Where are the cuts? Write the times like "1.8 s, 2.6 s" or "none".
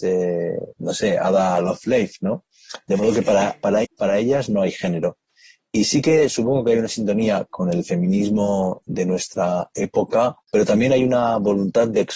3.8 s, 10.4 s